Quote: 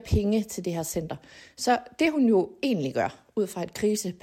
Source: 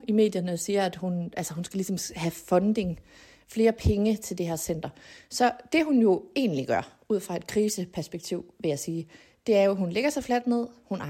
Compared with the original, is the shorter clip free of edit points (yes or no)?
yes